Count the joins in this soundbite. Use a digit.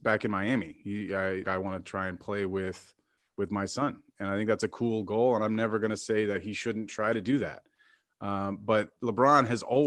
1